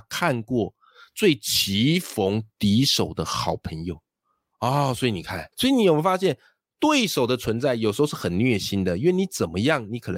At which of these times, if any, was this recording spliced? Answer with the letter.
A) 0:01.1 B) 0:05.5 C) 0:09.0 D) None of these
B